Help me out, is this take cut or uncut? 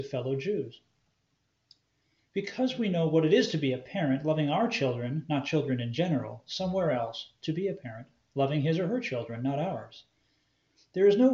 cut